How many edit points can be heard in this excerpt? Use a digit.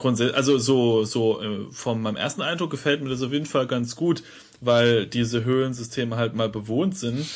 0